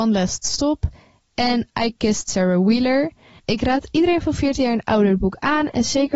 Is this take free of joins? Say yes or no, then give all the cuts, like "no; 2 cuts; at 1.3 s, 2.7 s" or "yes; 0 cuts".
no; 1 cut; at 3.4 s